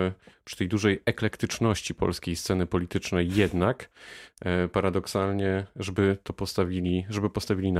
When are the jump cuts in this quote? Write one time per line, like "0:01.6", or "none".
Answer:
none